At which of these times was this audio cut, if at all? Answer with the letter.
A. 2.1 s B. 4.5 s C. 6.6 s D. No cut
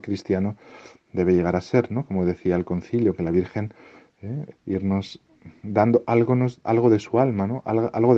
B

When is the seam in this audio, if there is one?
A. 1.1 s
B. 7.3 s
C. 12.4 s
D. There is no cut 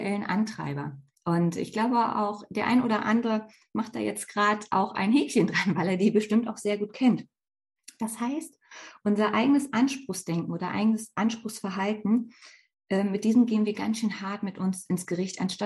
A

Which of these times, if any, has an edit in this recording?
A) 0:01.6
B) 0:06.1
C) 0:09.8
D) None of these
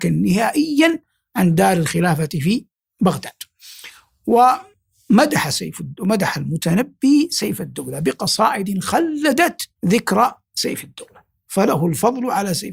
C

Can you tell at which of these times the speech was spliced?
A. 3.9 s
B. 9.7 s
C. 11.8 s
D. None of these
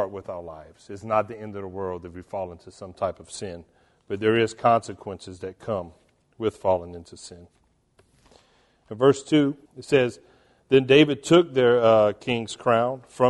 B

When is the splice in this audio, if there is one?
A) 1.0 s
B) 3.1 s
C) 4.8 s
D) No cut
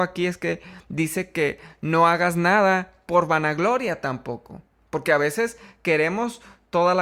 D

